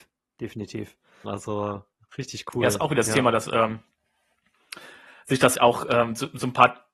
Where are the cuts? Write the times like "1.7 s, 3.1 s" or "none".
1.2 s, 5.5 s